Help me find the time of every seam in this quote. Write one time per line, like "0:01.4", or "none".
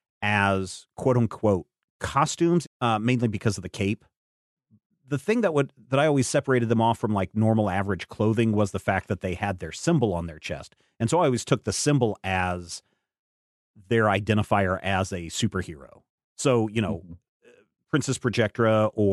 0:02.6

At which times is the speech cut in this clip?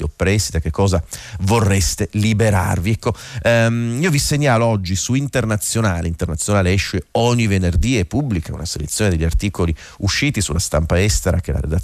none

